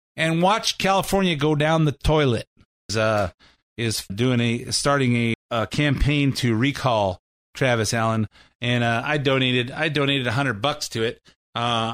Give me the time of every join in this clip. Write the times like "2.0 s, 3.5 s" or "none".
2.9 s, 4.1 s, 5.3 s